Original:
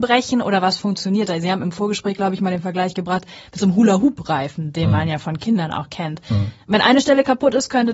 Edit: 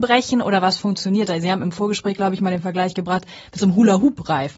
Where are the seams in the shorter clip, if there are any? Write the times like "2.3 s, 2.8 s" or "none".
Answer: none